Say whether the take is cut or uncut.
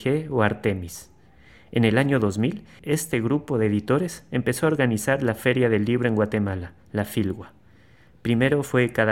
uncut